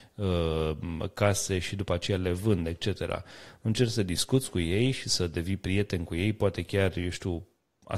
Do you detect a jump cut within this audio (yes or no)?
no